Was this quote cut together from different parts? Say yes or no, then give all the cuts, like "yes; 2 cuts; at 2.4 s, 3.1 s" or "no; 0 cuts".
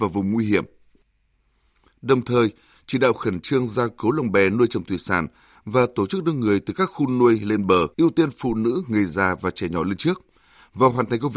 yes; 1 cut; at 7.9 s